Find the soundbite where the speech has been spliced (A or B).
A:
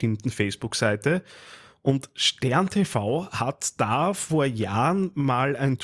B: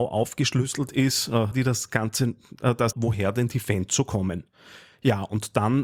B